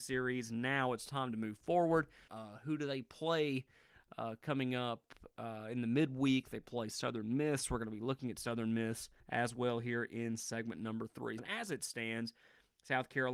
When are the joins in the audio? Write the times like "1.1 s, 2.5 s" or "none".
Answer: 2.3 s, 9.2 s, 11.4 s